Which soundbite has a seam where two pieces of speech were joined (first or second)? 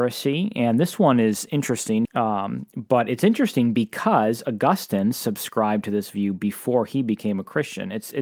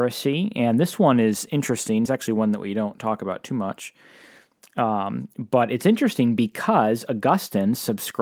first